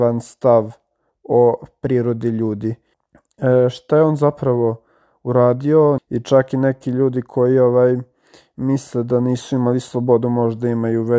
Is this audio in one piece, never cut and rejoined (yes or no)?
no